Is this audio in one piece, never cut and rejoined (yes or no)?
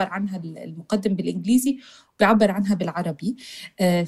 yes